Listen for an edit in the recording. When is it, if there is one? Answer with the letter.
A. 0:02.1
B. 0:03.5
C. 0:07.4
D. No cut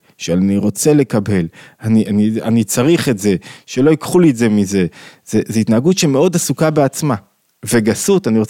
A